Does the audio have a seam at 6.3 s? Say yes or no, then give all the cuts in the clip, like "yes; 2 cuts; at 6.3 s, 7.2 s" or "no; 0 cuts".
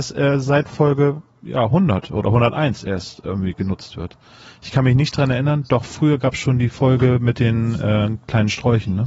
no; 0 cuts